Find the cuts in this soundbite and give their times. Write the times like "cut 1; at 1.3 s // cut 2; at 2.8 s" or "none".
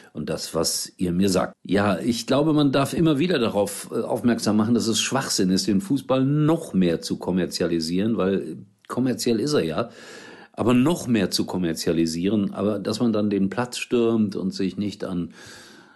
cut 1; at 1.5 s